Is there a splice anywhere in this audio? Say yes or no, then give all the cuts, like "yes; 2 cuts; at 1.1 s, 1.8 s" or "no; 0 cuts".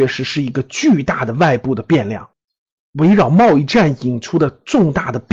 yes; 1 cut; at 2.8 s